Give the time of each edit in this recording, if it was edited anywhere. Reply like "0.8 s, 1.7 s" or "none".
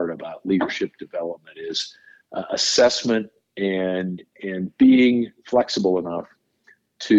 none